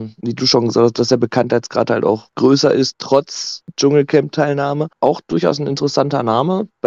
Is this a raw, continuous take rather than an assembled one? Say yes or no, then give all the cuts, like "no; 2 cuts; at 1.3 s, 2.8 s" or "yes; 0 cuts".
yes; 0 cuts